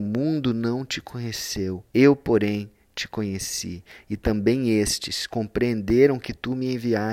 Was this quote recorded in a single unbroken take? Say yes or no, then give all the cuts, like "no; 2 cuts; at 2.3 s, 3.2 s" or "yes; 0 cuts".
no; 1 cut; at 1.9 s